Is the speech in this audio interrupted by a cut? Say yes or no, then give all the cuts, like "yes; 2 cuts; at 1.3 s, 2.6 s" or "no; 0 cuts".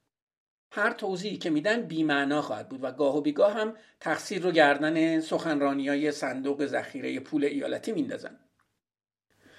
no; 0 cuts